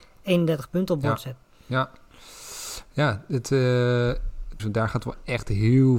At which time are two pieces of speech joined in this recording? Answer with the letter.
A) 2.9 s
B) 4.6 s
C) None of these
B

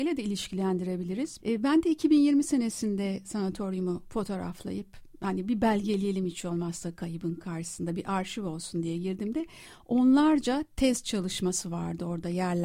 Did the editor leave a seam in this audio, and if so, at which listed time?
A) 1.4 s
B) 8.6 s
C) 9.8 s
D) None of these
A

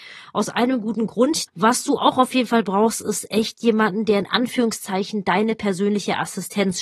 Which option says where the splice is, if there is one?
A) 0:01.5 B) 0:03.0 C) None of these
A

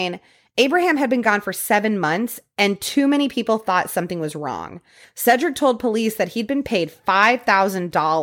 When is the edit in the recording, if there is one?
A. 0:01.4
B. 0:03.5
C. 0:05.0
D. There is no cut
C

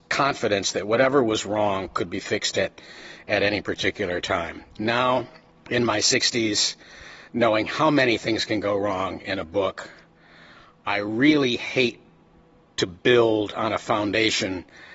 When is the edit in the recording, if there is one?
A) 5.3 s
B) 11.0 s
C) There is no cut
C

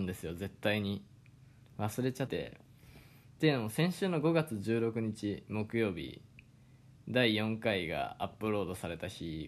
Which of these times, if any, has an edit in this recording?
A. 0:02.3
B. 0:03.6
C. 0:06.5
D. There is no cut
A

